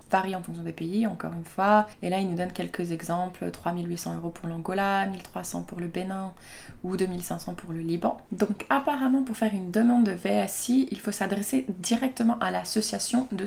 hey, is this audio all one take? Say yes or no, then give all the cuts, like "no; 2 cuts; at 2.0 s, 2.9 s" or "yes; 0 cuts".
yes; 0 cuts